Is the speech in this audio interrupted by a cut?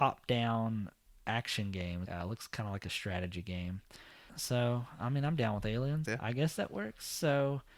yes; 3 cuts; at 2.0 s, 4.3 s, 6.0 s

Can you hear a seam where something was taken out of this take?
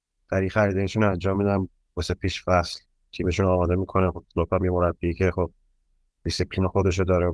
no; 0 cuts

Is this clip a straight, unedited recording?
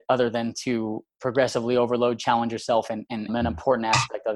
no; 1 cut; at 3.3 s

